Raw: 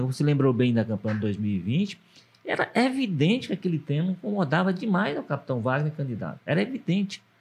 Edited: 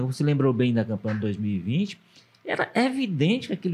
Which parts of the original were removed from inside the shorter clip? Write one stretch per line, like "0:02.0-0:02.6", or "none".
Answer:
none